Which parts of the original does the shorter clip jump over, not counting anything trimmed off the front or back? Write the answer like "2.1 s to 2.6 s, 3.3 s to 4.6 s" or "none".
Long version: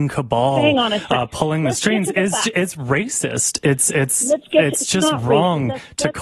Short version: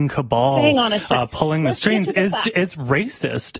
none